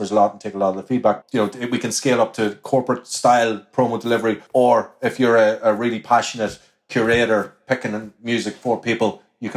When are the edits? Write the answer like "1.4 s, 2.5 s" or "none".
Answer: 1.2 s